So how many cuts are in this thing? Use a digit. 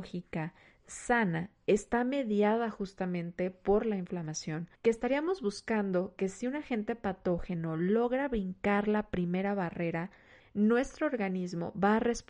2